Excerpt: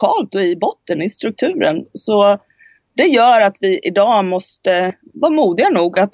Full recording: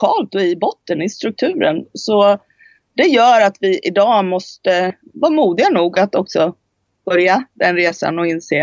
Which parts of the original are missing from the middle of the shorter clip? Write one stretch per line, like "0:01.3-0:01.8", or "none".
none